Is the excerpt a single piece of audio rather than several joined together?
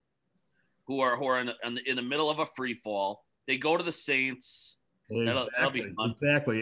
no; 1 cut; at 5.0 s

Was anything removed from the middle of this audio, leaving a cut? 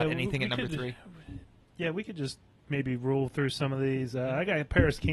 no; 0 cuts

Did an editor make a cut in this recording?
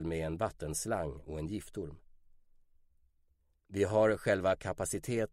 no; 0 cuts

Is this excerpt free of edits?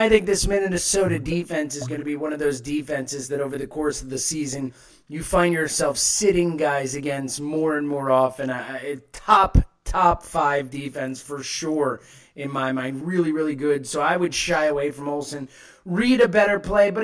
yes; 0 cuts

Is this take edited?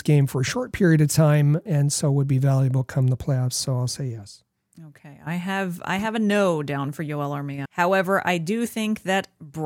yes; 2 cuts; at 1.7 s, 7.7 s

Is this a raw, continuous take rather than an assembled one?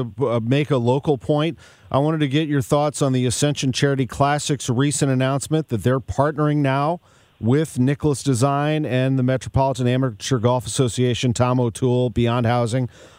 yes; 0 cuts

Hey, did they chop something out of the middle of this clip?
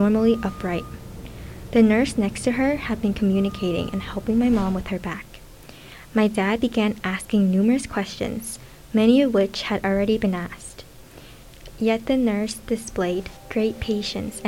no; 0 cuts

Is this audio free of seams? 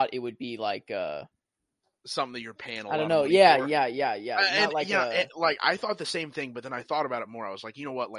yes; 0 cuts

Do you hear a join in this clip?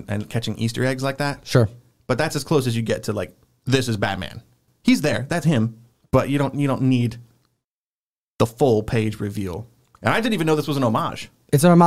yes; 1 cut; at 4.7 s

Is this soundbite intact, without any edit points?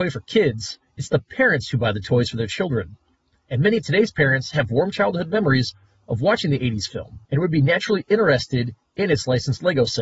yes; 0 cuts

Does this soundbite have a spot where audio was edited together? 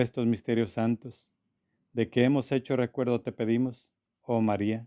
no; 0 cuts

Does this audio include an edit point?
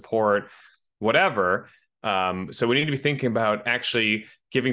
yes; 1 cut; at 2.0 s

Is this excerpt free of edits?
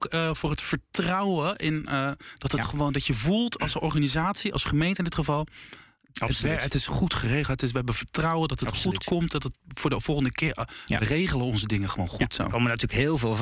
yes; 0 cuts

